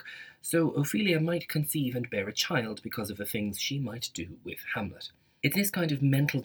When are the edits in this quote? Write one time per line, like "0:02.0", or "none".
0:05.4

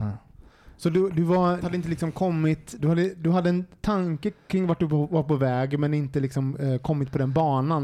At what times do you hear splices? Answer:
0:01.6
0:02.8

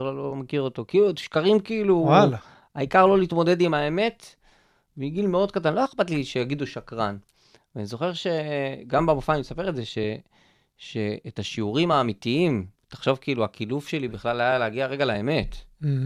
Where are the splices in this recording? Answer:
none

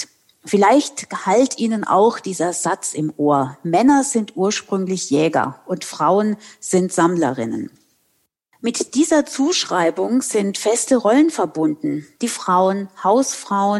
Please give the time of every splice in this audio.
0:12.2

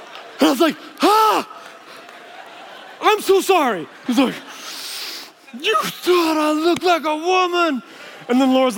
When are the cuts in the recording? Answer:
0:04.1

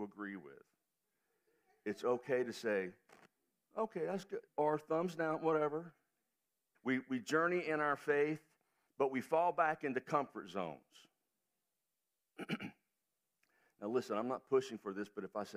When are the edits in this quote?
0:04.5
0:06.7

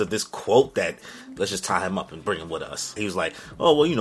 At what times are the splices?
0:01.4
0:03.0

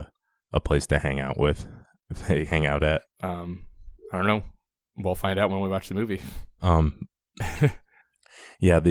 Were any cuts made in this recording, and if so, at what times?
0:03.1
0:06.6

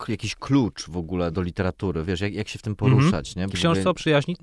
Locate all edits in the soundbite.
0:01.3
0:03.5

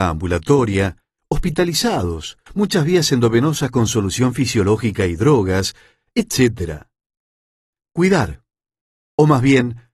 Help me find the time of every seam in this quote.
0:02.5
0:07.8

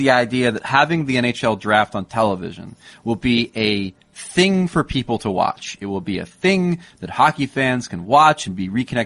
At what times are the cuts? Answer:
none

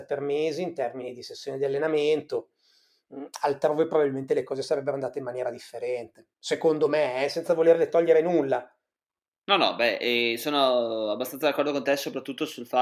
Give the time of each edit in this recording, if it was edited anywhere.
none

